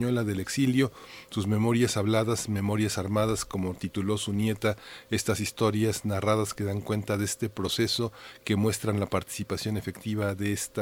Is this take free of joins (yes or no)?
yes